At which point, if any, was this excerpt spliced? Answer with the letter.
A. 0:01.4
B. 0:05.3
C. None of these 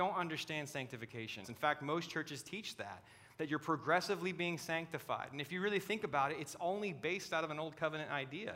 A